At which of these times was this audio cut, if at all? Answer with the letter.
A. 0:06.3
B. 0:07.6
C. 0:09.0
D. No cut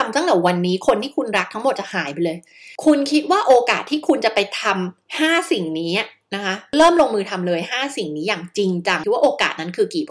C